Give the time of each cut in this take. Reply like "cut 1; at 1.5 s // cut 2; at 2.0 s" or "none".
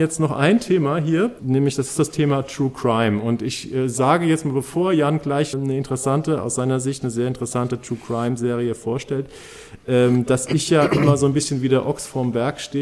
cut 1; at 1.4 s // cut 2; at 5.5 s